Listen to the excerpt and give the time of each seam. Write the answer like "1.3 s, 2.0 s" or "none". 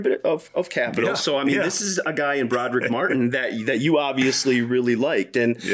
none